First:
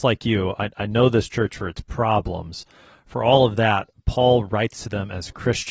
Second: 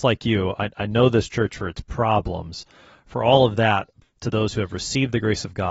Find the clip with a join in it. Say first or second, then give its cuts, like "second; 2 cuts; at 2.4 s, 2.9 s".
second; 1 cut; at 4.0 s